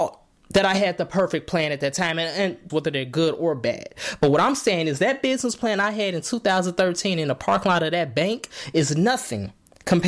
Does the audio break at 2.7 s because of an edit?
yes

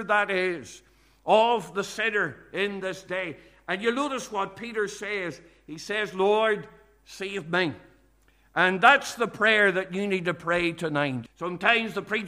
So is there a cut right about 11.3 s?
yes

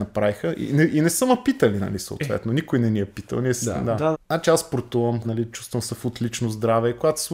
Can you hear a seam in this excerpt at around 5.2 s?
yes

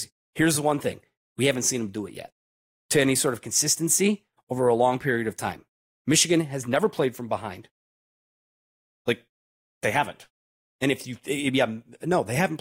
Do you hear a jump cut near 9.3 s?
no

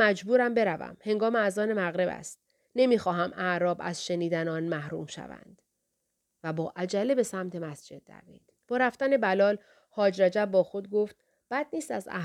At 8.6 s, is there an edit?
yes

